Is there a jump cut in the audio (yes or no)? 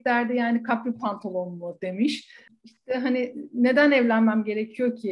yes